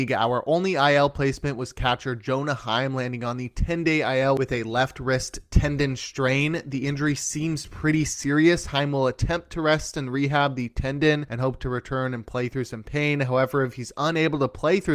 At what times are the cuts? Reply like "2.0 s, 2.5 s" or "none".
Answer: none

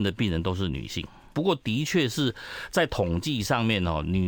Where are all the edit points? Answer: 1.3 s

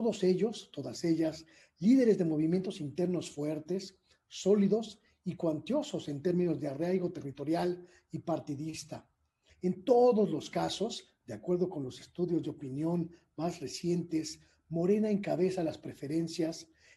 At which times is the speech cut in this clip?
9.5 s

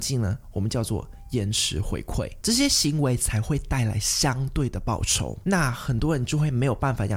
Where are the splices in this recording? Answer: 2.4 s

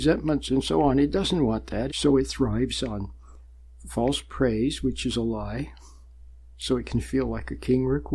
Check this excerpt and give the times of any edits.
1.9 s

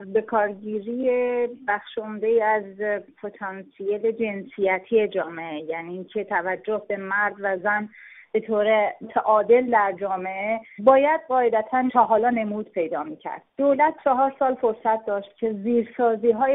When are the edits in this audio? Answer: 13.5 s

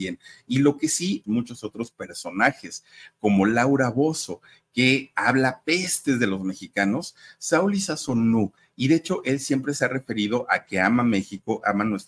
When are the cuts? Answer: 1.2 s

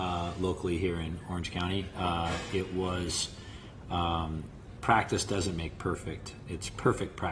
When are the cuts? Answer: 4.8 s

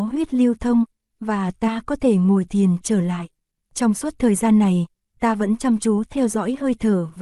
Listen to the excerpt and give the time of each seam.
3.6 s

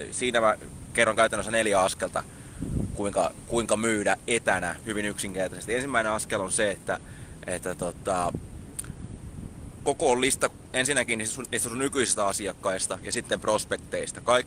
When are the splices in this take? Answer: none

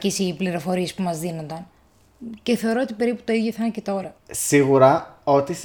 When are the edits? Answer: 4.2 s

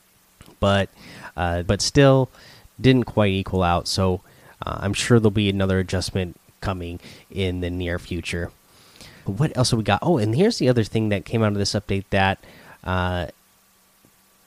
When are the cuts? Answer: 1.7 s, 9.3 s

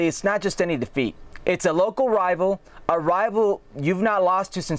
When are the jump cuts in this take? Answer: 1.4 s

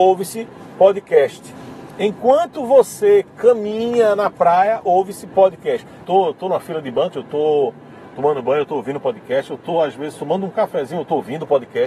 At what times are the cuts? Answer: 6.0 s, 7.1 s

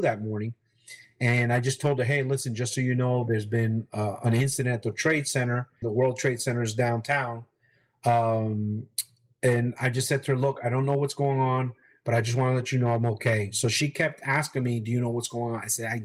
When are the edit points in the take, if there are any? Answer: 5.8 s

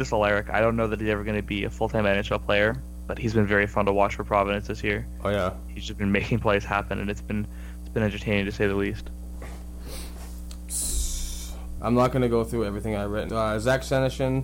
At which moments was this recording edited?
11.8 s, 13.3 s

